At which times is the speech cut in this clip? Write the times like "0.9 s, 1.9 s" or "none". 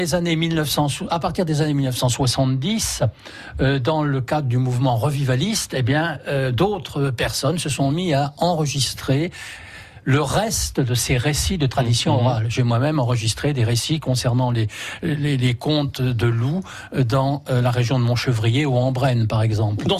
none